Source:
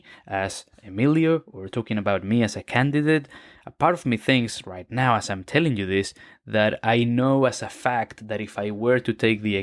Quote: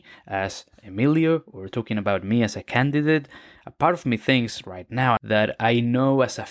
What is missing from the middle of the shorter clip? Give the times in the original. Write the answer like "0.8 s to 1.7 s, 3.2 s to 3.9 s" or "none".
5.2 s to 6.4 s